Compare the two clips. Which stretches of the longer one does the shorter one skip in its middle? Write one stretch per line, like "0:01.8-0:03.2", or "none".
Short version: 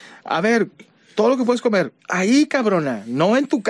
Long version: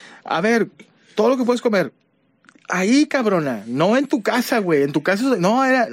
0:02.0-0:02.6